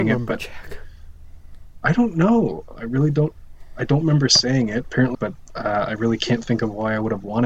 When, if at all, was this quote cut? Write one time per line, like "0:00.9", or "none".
0:05.1